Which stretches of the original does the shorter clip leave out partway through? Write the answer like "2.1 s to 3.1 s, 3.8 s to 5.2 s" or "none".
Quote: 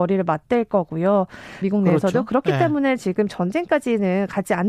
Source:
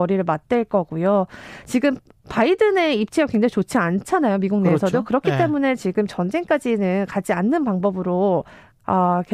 1.6 s to 4.4 s